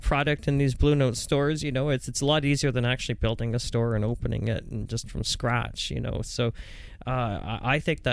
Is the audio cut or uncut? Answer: uncut